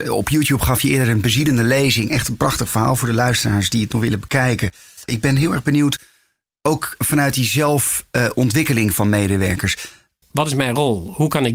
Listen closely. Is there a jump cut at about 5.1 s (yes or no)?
yes